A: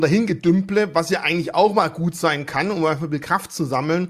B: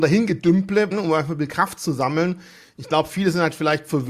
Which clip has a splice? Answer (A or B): B